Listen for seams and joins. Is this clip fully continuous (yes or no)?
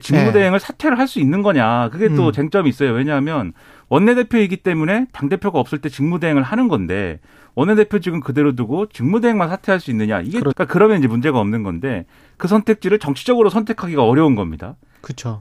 no